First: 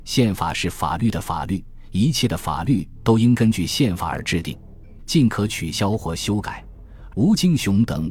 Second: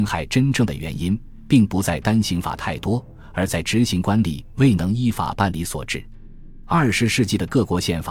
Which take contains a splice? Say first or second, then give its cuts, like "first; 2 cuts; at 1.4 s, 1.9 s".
first; 2 cuts; at 5.0 s, 7.1 s